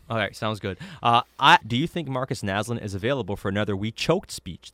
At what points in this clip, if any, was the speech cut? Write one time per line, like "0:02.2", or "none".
0:01.6